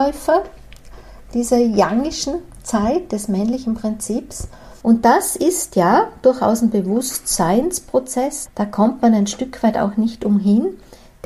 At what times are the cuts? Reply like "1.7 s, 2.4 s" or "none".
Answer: 4.8 s, 8.5 s